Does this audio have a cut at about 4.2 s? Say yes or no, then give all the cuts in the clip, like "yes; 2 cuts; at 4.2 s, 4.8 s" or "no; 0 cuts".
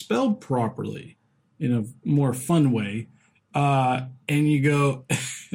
yes; 1 cut; at 4.2 s